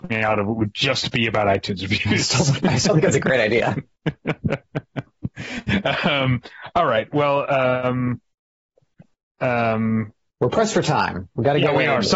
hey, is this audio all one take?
yes; 0 cuts

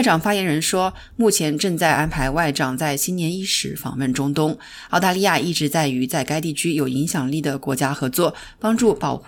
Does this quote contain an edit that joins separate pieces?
no; 0 cuts

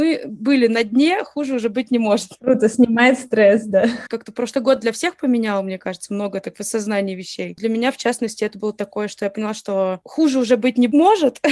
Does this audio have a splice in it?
yes; 1 cut; at 4.1 s

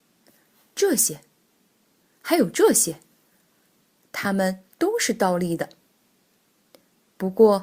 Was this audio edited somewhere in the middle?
no; 0 cuts

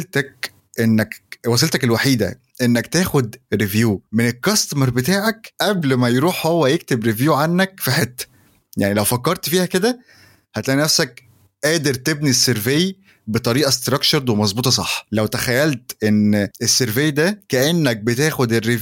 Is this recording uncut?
no; 1 cut; at 3.4 s

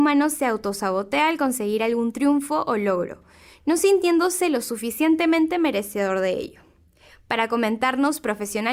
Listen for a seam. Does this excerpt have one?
no; 0 cuts

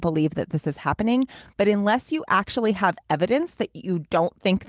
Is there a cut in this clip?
no; 0 cuts

